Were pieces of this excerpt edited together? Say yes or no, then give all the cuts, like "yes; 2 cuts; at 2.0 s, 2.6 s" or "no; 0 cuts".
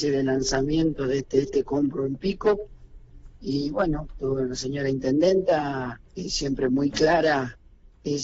yes; 1 cut; at 6.0 s